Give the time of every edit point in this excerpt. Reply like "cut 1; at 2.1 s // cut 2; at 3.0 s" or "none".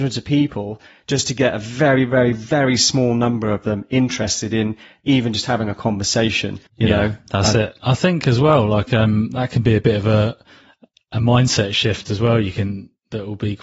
cut 1; at 6.7 s

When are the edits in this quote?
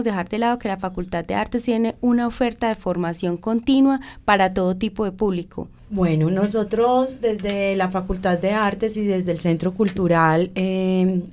cut 1; at 5.8 s

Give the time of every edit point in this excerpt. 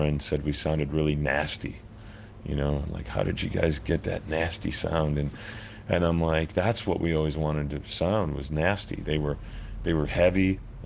cut 1; at 9.0 s

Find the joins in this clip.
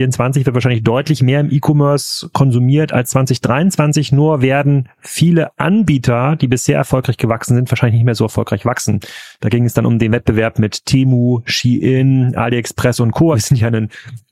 cut 1; at 13.3 s

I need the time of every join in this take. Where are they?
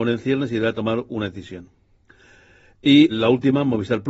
cut 1; at 3.1 s

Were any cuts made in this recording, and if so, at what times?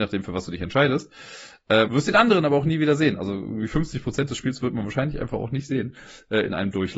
cut 1; at 1.9 s

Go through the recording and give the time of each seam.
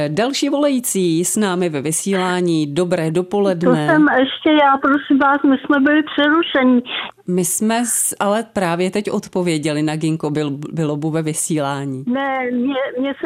cut 1; at 7.1 s

